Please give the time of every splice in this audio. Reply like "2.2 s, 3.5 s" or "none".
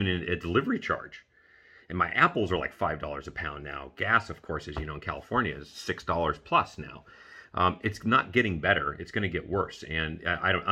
none